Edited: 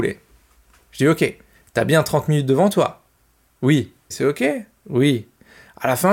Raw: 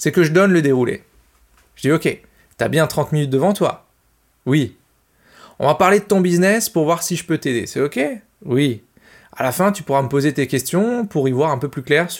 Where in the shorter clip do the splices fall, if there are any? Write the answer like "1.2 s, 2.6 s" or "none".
4.1 s

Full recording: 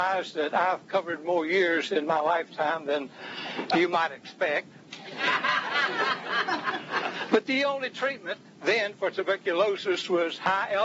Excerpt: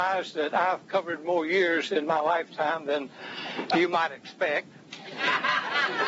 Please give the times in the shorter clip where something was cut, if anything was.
none

